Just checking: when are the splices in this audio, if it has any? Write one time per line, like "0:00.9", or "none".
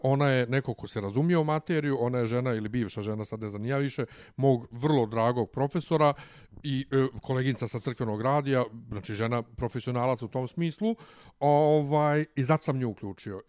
none